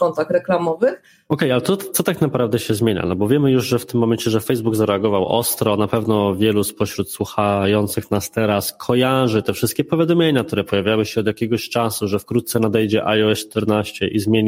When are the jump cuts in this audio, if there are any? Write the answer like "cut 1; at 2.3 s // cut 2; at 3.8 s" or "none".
none